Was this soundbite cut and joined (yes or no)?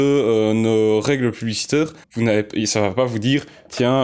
yes